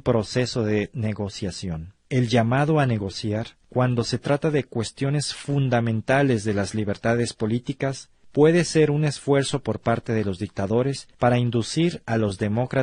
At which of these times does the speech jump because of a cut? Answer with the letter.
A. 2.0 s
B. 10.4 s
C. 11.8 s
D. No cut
A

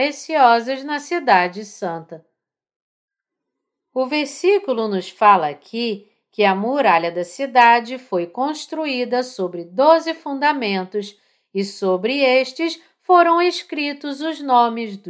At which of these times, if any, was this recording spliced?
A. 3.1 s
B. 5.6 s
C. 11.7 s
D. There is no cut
D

